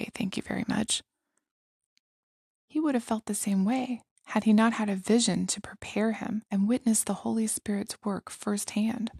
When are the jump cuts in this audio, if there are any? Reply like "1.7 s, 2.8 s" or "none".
2.5 s, 6.5 s